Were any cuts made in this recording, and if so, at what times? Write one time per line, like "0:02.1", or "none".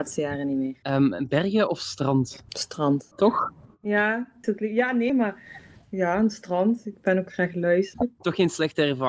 0:05.1
0:07.9

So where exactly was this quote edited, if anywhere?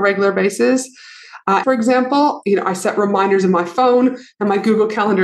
0:01.6

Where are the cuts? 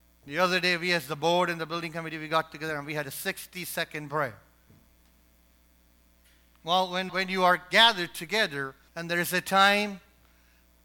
0:07.1
0:08.9

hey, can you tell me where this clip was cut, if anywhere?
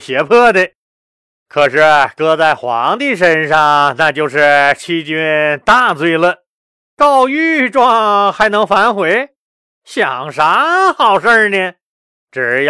none

